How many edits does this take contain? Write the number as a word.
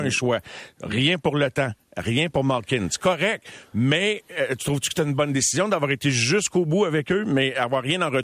zero